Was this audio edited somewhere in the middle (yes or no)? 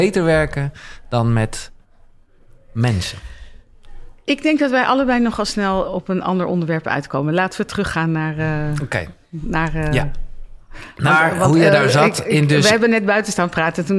yes